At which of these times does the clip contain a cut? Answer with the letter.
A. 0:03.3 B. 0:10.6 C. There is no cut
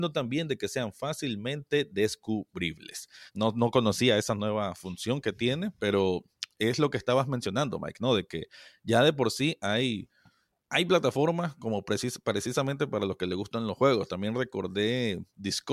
A